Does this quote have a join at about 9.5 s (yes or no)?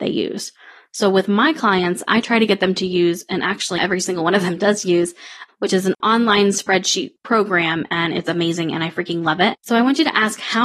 yes